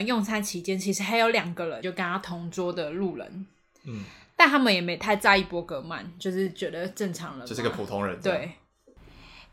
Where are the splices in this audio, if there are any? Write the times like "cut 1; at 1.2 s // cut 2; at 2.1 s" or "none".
cut 1; at 1.8 s